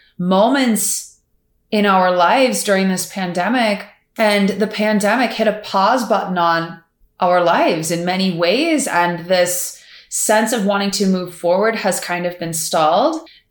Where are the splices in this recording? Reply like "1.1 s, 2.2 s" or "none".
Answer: none